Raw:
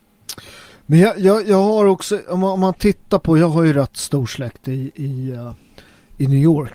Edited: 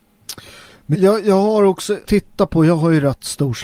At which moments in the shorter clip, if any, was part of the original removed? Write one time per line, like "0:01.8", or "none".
0:00.9
0:02.0